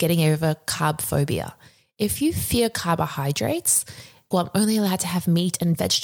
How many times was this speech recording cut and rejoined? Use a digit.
1